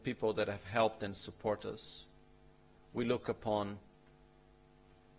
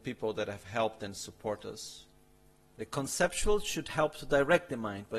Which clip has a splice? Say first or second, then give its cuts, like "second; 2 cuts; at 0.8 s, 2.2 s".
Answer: second; 1 cut; at 2.7 s